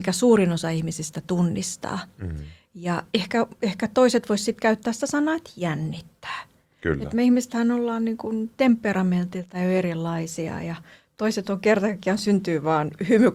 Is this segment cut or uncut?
uncut